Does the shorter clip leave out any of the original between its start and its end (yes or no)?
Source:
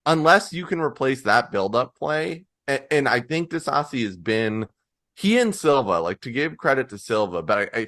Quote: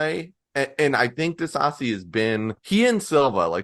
yes